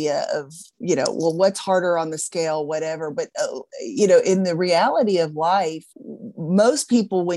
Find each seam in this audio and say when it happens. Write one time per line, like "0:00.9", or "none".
0:05.9